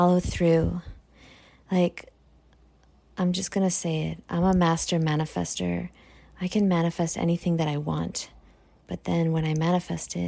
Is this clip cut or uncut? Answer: cut